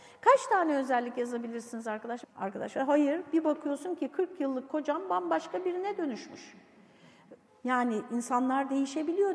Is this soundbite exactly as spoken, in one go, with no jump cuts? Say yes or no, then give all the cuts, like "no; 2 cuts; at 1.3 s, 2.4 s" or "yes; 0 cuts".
no; 2 cuts; at 2.2 s, 7.5 s